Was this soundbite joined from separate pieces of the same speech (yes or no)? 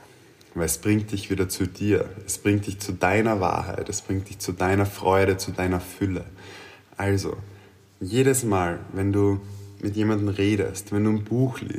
no